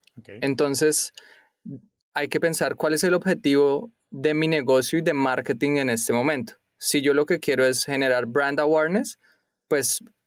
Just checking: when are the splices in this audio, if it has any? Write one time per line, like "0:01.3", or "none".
0:02.0